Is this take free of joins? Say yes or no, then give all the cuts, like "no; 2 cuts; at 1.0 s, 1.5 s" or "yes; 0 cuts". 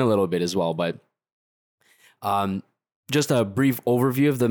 yes; 0 cuts